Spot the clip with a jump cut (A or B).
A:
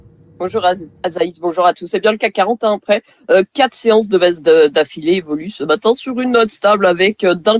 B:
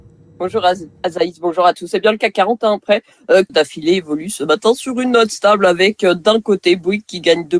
B